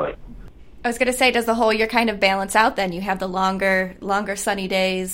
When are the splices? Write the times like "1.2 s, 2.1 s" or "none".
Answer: none